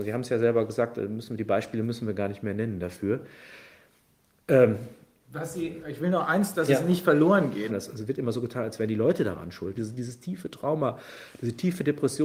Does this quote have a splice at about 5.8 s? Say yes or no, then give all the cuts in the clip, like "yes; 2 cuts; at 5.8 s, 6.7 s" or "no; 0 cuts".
yes; 3 cuts; at 5.8 s, 7.7 s, 9.8 s